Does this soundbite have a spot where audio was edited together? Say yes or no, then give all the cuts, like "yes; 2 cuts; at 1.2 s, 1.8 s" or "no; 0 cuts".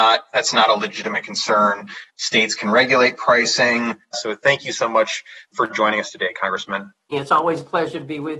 yes; 3 cuts; at 2.1 s, 4.1 s, 7.1 s